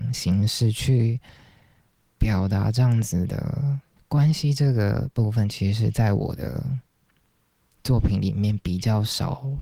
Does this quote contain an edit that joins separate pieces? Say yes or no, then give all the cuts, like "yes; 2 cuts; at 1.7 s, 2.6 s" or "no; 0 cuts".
yes; 1 cut; at 4.0 s